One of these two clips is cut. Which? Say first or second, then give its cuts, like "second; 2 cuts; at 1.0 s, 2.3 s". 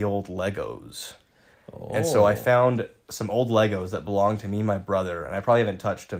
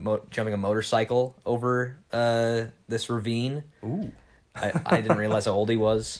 second; 1 cut; at 4.5 s